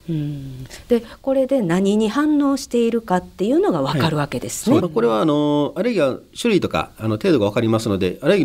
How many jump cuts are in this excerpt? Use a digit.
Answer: 1